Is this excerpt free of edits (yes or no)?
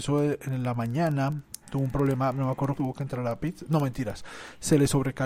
no